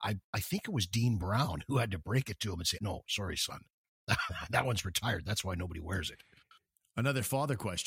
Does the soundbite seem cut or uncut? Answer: cut